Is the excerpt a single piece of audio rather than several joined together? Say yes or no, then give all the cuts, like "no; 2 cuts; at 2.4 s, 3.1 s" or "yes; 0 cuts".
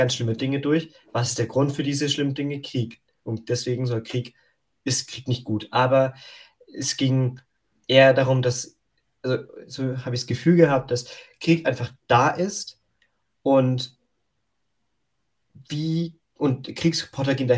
yes; 0 cuts